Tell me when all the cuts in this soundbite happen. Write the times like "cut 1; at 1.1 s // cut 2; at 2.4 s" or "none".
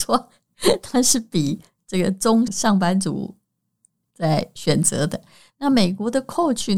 cut 1; at 2.5 s